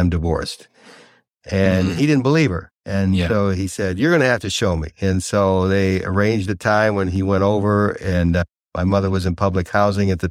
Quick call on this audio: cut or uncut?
uncut